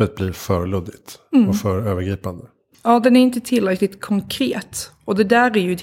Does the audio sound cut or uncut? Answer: uncut